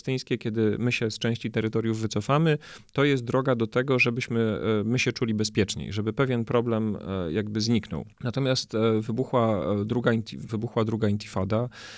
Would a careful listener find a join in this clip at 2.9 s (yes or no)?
no